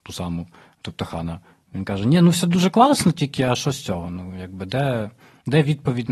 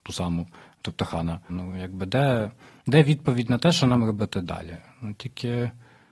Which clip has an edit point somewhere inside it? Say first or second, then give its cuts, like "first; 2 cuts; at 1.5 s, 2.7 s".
second; 1 cut; at 1.5 s